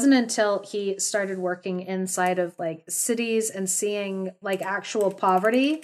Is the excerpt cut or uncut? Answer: uncut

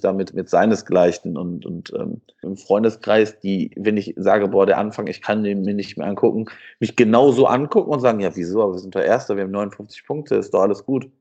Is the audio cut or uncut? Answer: cut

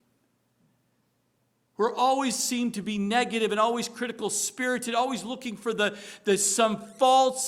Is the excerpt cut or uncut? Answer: uncut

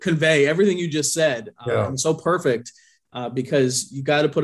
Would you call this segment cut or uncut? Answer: uncut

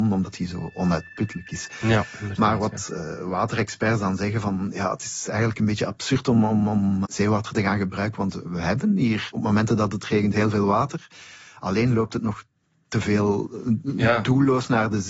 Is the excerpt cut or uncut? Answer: cut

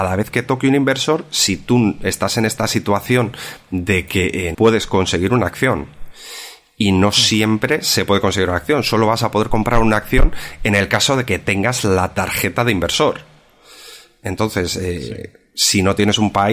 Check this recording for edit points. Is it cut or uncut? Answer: cut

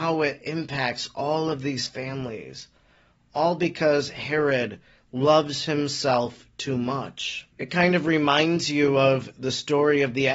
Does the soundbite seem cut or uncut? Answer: cut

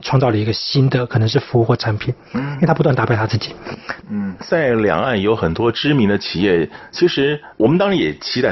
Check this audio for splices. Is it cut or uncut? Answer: cut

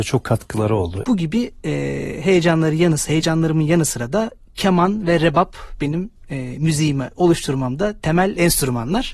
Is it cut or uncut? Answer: cut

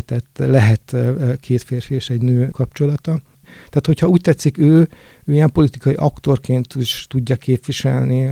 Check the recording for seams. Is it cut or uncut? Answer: cut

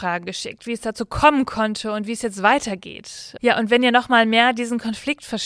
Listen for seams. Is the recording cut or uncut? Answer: cut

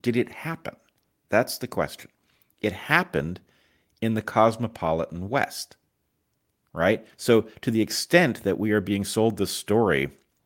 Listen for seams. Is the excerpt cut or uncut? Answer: uncut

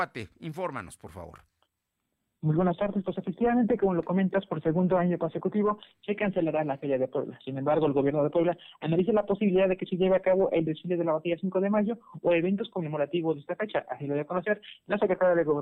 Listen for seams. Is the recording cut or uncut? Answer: uncut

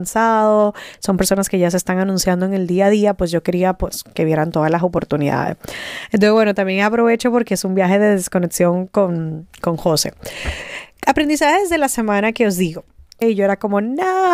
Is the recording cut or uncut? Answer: cut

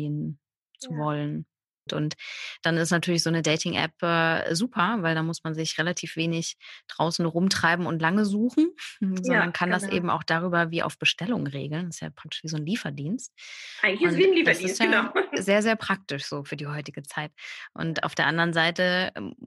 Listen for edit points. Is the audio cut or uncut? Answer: cut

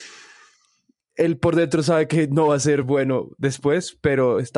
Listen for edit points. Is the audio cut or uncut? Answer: uncut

